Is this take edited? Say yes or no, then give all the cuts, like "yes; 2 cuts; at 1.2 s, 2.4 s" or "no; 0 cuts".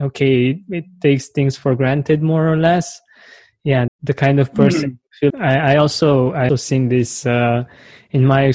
yes; 3 cuts; at 3.9 s, 5.3 s, 6.5 s